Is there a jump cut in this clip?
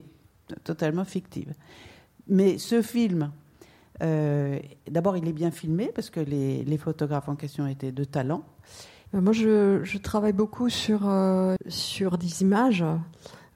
yes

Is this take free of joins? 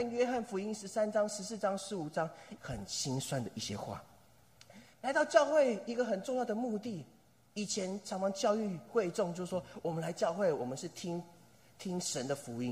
no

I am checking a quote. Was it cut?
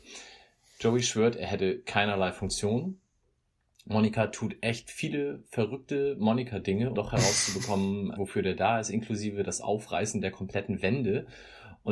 yes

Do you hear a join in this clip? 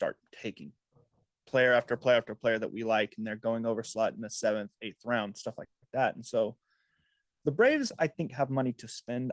no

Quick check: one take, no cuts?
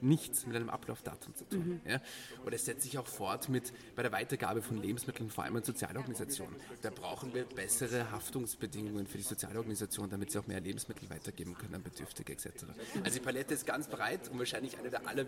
yes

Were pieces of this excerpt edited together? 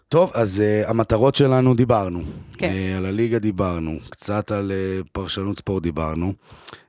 no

